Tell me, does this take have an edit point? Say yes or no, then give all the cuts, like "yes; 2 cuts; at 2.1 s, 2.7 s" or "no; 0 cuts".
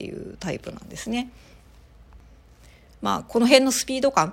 no; 0 cuts